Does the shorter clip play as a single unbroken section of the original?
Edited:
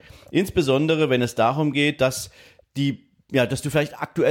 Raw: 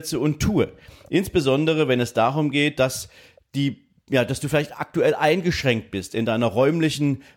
yes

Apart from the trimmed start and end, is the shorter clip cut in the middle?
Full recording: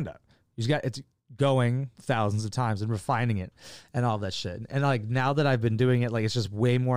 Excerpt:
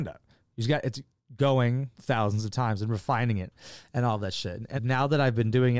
yes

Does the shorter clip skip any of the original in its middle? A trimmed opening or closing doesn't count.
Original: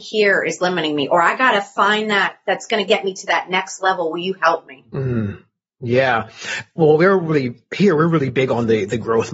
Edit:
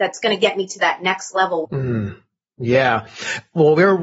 yes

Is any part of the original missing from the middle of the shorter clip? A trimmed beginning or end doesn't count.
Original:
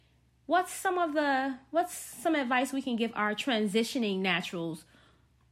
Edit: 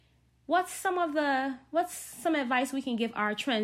no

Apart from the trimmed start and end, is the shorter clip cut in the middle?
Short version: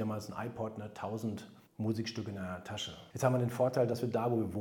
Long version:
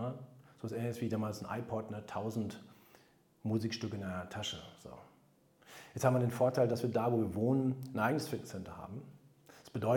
yes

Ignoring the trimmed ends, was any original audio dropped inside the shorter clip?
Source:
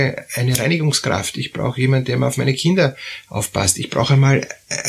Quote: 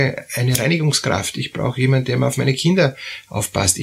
no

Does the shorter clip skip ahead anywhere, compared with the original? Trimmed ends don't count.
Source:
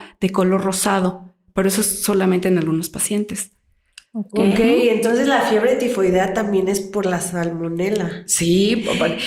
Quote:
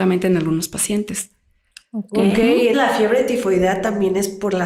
yes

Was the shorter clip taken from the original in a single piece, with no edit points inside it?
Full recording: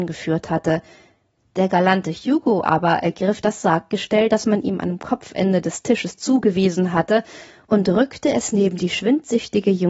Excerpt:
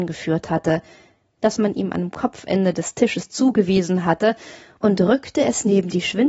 no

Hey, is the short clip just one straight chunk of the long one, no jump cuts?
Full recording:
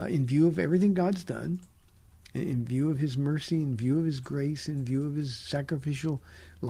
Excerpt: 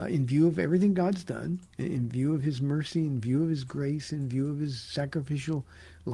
no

